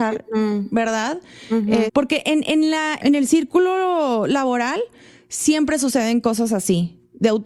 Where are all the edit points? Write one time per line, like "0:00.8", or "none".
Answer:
0:01.9
0:03.0